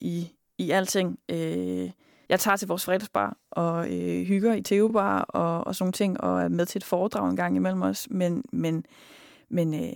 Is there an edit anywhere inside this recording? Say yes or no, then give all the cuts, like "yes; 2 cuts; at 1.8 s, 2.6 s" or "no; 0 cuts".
no; 0 cuts